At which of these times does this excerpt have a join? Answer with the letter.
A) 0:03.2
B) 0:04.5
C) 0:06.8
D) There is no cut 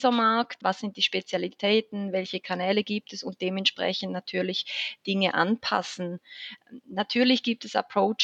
D